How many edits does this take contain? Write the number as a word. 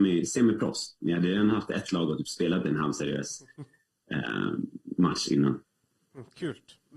one